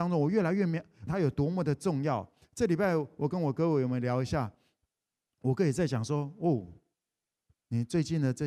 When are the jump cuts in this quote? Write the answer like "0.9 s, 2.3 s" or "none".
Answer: 1.1 s